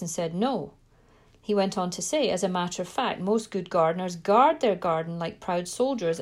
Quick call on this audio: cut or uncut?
uncut